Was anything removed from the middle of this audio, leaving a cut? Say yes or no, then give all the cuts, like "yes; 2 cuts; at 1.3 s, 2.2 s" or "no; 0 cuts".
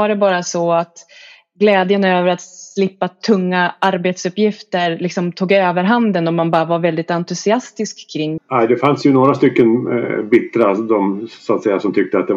yes; 1 cut; at 8.4 s